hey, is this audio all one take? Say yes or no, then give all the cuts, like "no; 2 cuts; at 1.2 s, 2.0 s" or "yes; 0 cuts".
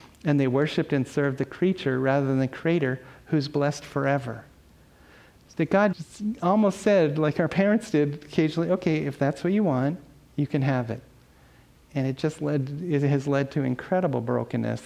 no; 1 cut; at 5.9 s